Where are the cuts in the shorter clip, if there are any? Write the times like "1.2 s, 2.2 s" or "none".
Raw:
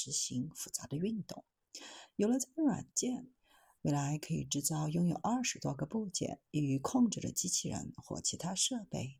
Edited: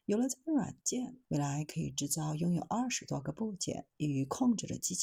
1.2 s